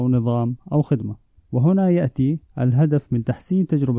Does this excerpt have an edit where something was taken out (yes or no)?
yes